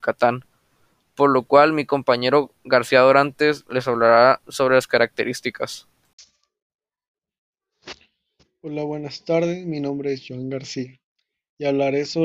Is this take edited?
no; 0 cuts

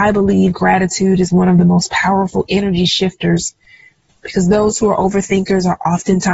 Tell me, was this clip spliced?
yes; 1 cut; at 2.5 s

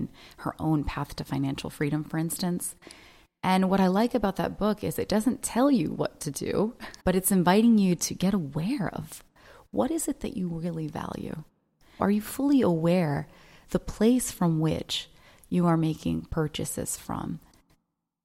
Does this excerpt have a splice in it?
yes; 2 cuts; at 7.0 s, 12.0 s

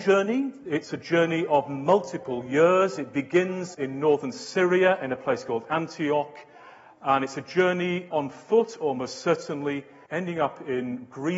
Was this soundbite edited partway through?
yes; 2 cuts; at 8.1 s, 10.1 s

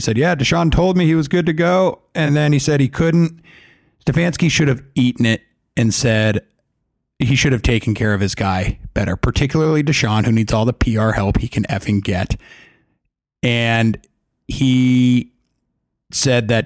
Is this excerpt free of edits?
yes; 0 cuts

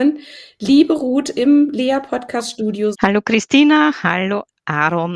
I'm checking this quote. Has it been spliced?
yes; 1 cut; at 2.9 s

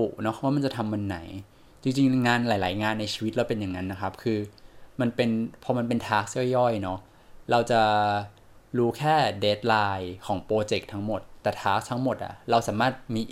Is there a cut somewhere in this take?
no; 0 cuts

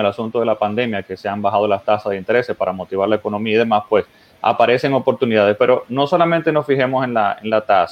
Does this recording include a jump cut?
no; 0 cuts

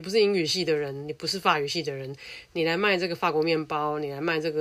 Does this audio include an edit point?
no; 0 cuts

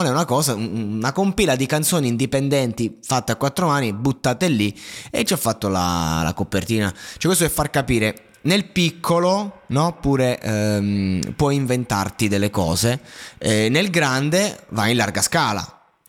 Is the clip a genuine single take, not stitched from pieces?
yes; 0 cuts

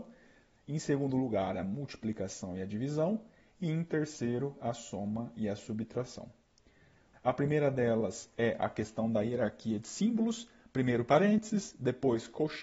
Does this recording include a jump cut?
yes; 1 cut; at 7.1 s

